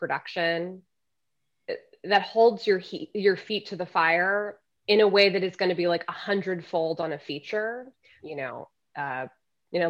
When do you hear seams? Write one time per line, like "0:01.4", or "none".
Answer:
0:08.2